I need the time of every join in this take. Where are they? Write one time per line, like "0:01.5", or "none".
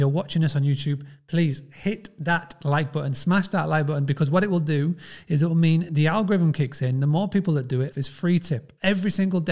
0:07.9